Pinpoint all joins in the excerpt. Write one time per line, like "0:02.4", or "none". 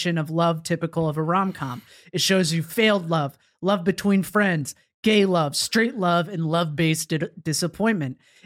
none